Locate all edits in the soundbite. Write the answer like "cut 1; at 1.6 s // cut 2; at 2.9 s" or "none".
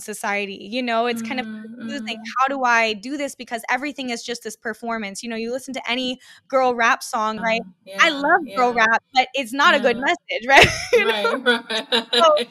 cut 1; at 7.4 s